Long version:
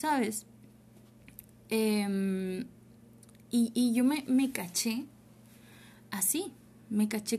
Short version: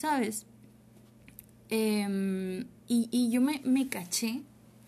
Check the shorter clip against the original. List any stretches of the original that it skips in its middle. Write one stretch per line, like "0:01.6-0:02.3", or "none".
0:02.8-0:03.4